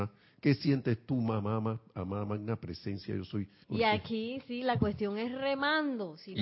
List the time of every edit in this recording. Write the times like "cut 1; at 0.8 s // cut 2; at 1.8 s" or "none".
cut 1; at 3.6 s